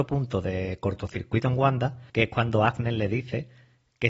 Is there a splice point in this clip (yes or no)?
yes